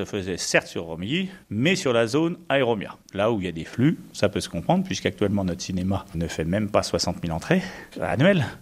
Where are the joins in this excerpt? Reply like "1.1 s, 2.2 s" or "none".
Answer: none